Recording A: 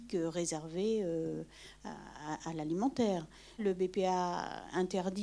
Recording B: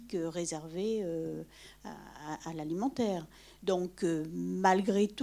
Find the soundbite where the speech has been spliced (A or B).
A